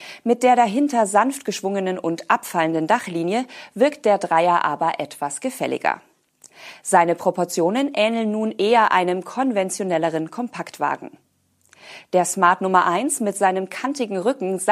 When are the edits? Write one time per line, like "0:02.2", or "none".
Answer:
none